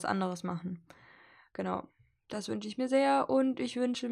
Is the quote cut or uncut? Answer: uncut